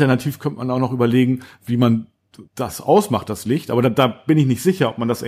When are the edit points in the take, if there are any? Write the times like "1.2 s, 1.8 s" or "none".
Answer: 2.5 s